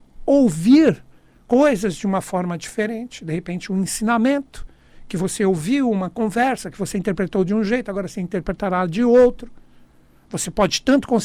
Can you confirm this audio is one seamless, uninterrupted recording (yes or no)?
yes